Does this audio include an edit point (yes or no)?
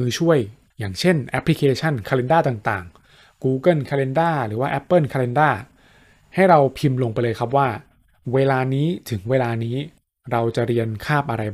no